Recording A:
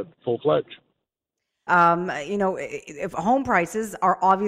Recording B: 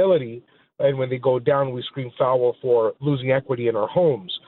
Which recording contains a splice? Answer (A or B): A